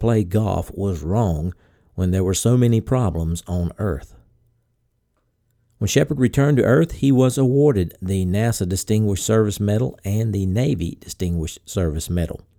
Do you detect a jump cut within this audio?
no; 0 cuts

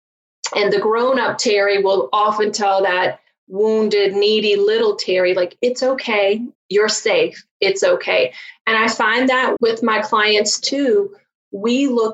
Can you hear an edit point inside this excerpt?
yes; 2 cuts; at 6.6 s, 9.6 s

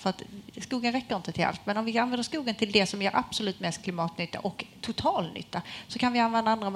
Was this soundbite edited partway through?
no; 0 cuts

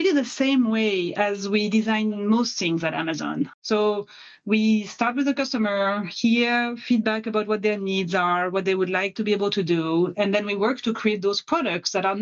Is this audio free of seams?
no; 1 cut; at 3.5 s

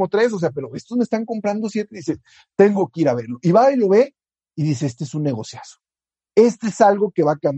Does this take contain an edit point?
no; 0 cuts

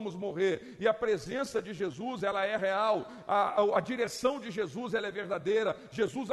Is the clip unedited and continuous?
yes; 0 cuts

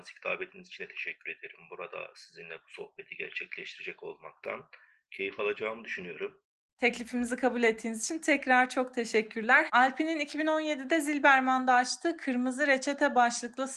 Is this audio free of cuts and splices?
no; 1 cut; at 9.7 s

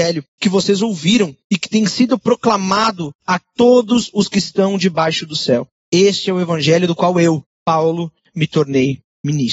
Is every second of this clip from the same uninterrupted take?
yes; 0 cuts

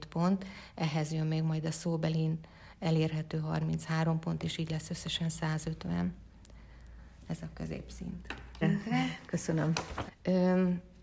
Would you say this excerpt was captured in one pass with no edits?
no; 2 cuts; at 8.6 s, 10.1 s

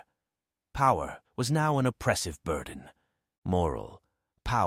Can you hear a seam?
yes; 2 cuts; at 1.2 s, 3.4 s

